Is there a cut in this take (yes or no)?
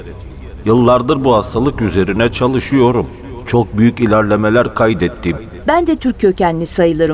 yes